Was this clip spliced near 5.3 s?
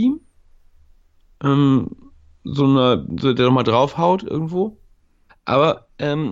yes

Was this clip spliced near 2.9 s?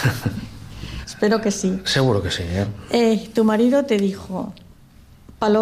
no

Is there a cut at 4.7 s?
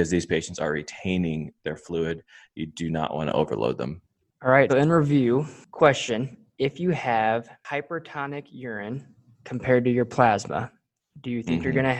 yes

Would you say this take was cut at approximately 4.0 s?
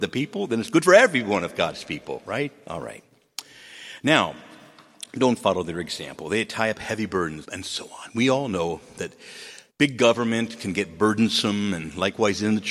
no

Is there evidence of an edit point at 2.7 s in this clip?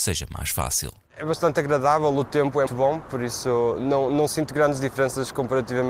yes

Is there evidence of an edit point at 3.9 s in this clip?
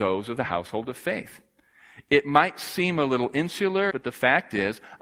yes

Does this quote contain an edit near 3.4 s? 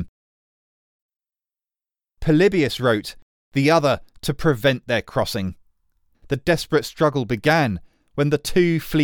yes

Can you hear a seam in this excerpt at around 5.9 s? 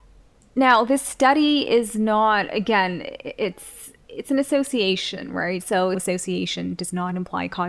yes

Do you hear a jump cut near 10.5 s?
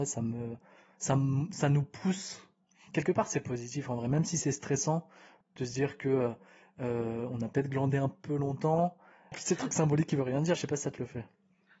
yes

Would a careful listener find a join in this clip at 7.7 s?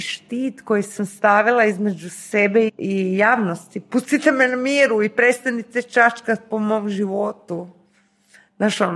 no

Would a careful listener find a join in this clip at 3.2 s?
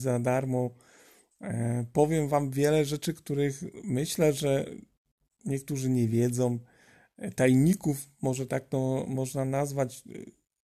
no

